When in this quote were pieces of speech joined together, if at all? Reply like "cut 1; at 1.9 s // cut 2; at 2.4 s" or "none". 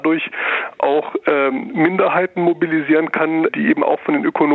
cut 1; at 3.5 s